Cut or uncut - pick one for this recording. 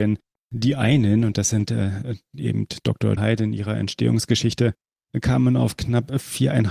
cut